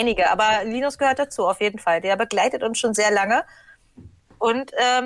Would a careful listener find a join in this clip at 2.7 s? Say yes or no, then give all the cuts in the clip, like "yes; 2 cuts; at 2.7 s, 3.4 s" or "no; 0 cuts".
no; 0 cuts